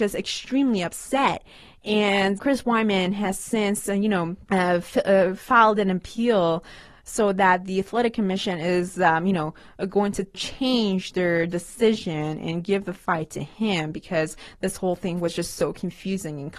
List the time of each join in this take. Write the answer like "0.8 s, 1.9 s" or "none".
2.4 s